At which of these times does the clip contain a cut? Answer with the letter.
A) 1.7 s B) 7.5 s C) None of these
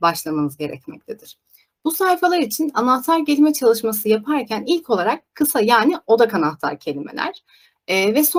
C